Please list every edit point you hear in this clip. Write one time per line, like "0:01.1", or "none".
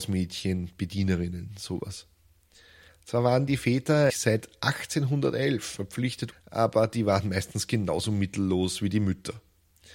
0:04.1
0:06.3